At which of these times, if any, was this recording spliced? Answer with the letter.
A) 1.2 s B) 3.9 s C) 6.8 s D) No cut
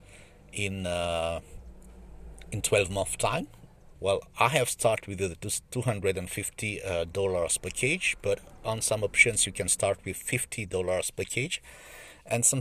B